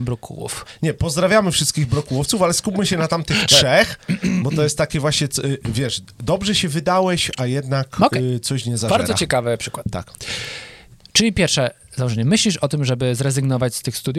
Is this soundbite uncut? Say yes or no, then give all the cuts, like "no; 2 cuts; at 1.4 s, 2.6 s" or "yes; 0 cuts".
yes; 0 cuts